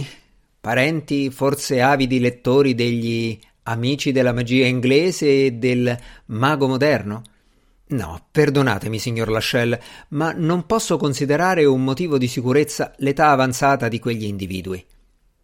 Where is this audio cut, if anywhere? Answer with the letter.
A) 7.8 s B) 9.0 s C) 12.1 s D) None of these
A